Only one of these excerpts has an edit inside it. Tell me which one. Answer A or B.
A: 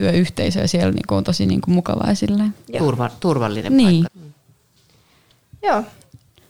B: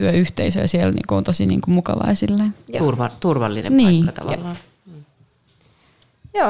A